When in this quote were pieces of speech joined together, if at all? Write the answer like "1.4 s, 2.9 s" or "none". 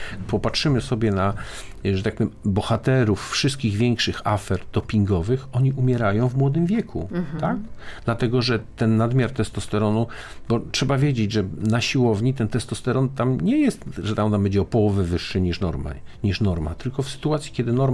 none